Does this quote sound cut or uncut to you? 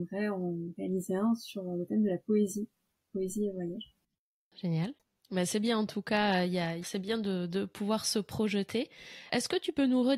cut